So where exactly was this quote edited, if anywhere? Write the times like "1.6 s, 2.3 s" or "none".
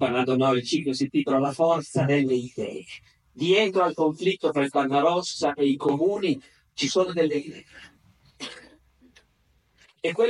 none